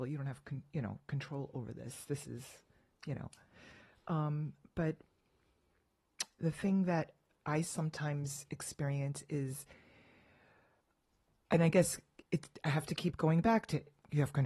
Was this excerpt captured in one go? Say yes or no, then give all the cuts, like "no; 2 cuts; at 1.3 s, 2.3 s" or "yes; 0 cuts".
yes; 0 cuts